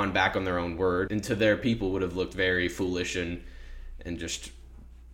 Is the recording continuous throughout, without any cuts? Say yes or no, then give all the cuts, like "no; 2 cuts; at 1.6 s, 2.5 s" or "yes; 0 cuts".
no; 1 cut; at 1.1 s